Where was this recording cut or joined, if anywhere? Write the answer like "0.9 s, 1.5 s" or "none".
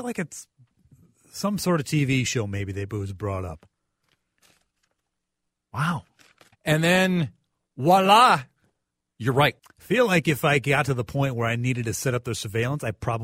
6.5 s, 9.6 s

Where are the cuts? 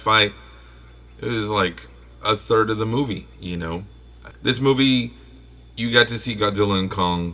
4.3 s

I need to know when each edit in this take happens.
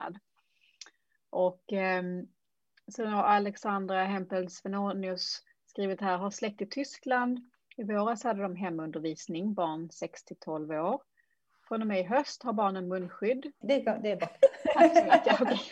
13.6 s

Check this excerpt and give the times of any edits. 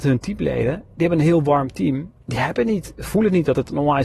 2.2 s

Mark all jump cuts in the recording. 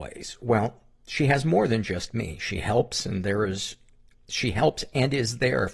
none

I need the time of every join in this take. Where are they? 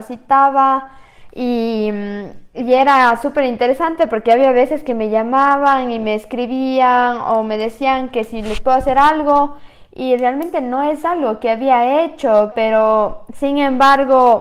12.5 s

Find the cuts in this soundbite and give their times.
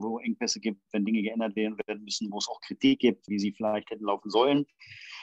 3.3 s

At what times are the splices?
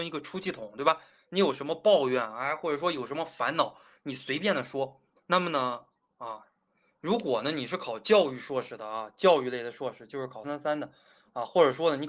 5.2 s, 10.4 s

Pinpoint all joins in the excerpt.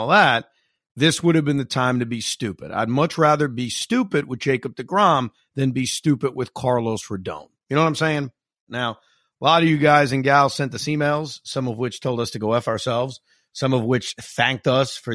8.7 s

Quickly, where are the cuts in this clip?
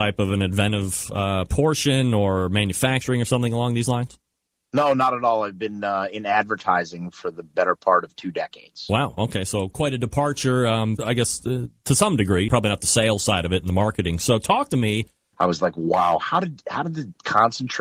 11.0 s, 12.5 s, 15.3 s

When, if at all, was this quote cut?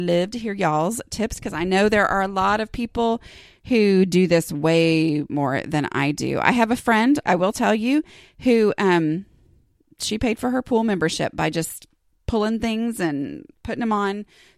7.2 s

